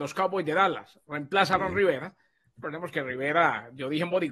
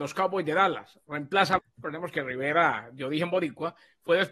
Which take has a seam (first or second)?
second